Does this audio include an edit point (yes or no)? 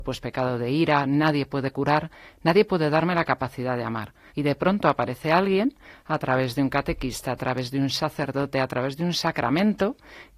yes